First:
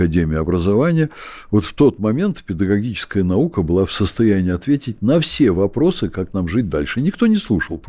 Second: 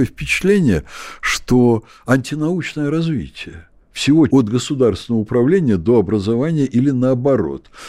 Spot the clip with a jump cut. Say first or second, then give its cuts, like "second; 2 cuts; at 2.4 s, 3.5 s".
second; 1 cut; at 4.3 s